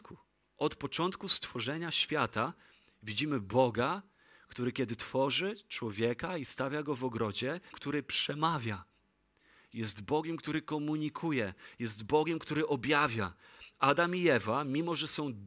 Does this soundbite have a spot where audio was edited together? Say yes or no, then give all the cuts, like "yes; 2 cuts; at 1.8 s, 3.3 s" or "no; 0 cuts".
yes; 1 cut; at 7.7 s